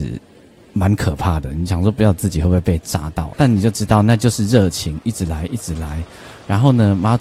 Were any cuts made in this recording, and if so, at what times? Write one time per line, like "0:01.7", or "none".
0:03.3
0:05.0